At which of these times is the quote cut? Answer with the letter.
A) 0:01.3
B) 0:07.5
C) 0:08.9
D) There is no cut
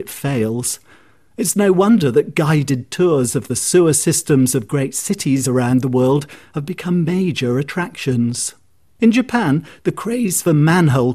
D